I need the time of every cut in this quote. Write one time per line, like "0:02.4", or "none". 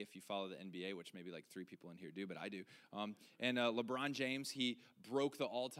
none